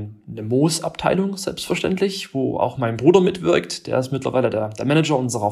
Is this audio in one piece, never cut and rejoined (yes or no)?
yes